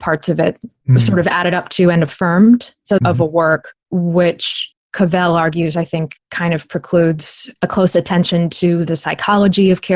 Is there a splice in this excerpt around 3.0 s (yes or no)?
yes